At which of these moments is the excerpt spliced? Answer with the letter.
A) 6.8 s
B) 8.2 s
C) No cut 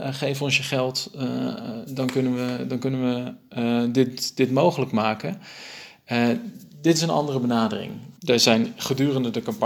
B